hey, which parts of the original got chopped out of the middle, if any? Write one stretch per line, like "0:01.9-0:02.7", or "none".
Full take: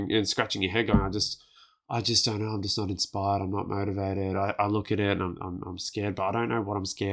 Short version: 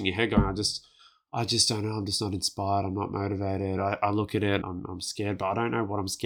0:05.2-0:05.4